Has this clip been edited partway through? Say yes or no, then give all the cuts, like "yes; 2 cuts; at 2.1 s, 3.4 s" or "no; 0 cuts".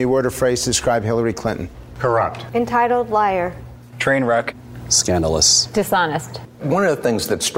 no; 0 cuts